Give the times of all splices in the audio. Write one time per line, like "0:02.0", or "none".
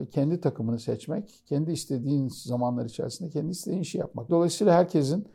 0:04.3